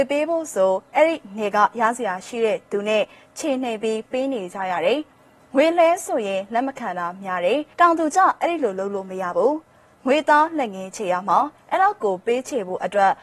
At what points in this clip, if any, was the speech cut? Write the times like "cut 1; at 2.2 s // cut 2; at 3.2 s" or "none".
cut 1; at 7.7 s